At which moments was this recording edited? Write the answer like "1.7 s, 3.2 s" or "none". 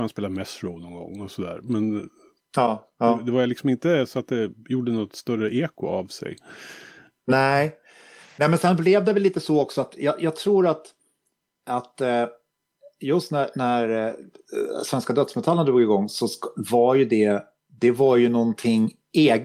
none